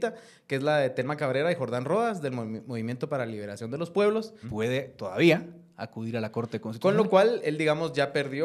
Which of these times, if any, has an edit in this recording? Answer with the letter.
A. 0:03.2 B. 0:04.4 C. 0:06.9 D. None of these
B